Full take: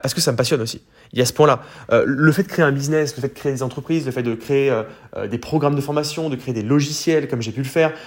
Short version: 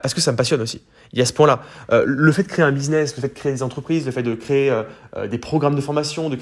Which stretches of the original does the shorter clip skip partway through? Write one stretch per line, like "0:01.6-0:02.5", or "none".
none